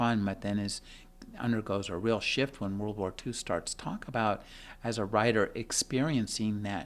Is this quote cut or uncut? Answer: uncut